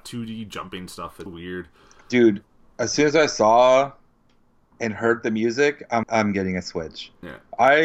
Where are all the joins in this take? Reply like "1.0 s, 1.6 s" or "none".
1.3 s, 6.0 s